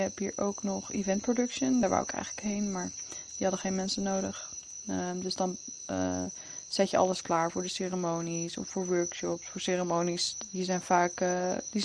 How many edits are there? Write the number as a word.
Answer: zero